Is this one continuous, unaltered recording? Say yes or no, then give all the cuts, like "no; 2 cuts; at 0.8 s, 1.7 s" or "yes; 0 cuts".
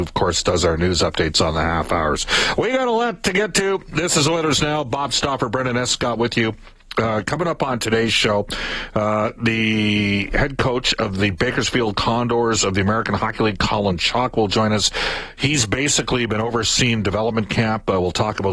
yes; 0 cuts